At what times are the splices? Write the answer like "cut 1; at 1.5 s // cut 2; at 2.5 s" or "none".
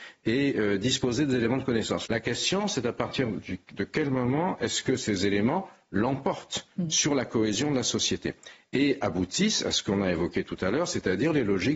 cut 1; at 2.1 s